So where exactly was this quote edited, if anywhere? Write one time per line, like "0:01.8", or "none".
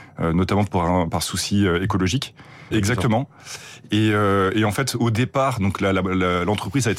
0:02.7